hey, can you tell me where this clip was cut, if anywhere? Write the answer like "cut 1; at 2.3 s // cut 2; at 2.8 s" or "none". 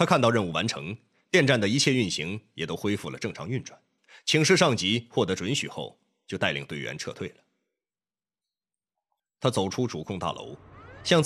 none